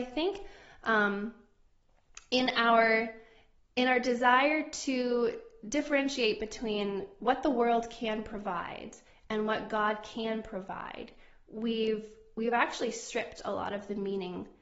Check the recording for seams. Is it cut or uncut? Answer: uncut